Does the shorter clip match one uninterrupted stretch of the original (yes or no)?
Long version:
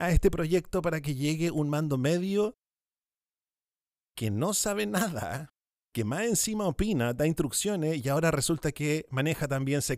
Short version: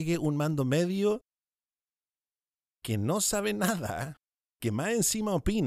yes